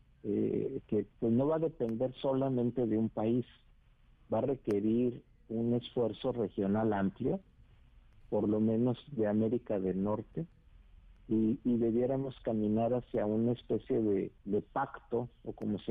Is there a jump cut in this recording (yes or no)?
yes